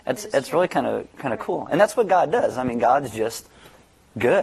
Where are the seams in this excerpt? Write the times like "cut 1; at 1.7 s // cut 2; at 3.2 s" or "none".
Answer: none